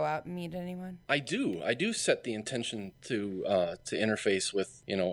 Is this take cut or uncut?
uncut